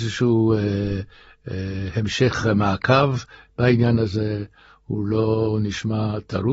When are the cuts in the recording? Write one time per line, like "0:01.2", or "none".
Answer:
none